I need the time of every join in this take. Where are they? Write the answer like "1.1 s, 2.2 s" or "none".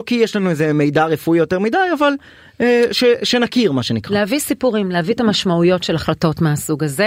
none